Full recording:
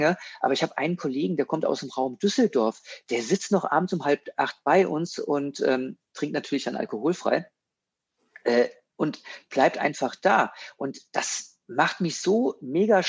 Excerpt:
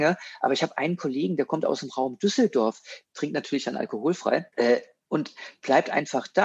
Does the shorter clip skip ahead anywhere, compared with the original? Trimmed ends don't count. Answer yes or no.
yes